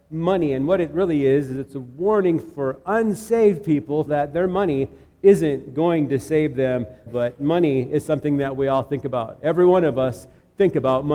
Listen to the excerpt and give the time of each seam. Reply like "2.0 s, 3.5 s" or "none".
4.1 s, 7.1 s